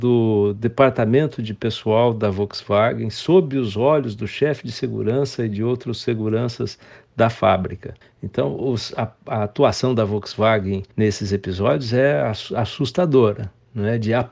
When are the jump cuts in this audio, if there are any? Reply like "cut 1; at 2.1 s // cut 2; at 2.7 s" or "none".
cut 1; at 8.0 s // cut 2; at 10.9 s